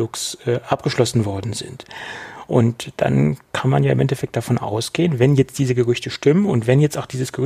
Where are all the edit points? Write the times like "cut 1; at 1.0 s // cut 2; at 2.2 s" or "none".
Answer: none